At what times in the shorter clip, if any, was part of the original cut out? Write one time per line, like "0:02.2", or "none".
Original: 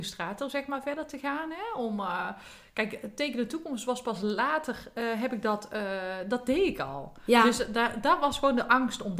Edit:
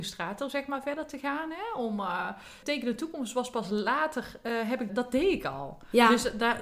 0:02.6
0:04.9